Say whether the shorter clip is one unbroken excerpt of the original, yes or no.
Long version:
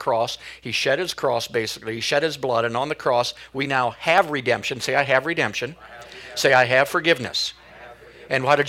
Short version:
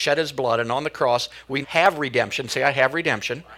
no